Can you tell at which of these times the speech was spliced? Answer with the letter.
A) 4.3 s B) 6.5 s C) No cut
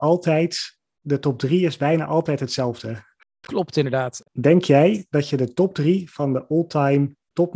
A